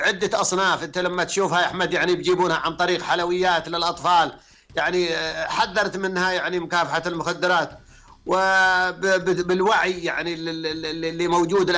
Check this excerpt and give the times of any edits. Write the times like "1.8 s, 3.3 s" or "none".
none